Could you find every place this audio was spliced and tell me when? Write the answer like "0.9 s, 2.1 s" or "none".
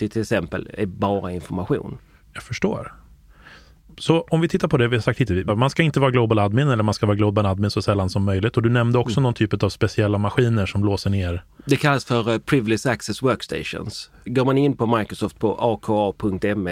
5.5 s